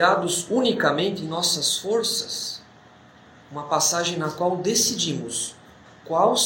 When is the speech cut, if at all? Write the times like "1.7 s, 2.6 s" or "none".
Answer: 3.4 s